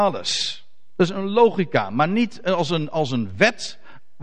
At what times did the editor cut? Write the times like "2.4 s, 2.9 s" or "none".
none